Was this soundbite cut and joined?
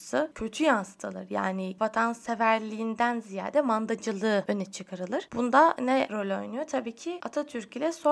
no; 0 cuts

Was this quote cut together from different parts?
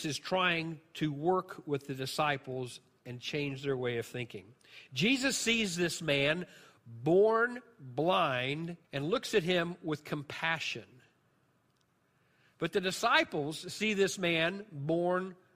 yes; 1 cut; at 8.8 s

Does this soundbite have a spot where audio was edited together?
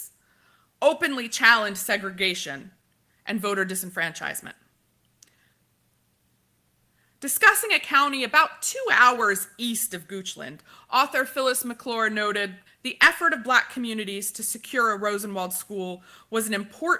yes; 1 cut; at 12.7 s

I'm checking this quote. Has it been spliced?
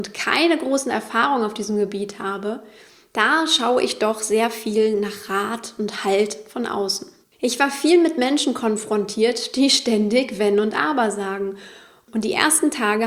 yes; 1 cut; at 7.2 s

